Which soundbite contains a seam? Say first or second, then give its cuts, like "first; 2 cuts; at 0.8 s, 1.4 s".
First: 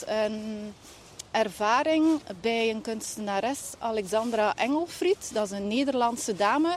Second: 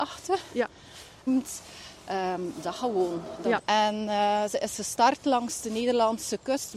second; 2 cuts; at 1.3 s, 3.6 s